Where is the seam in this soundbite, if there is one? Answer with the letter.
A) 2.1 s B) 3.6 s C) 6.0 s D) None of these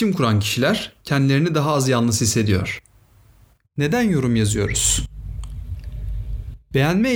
B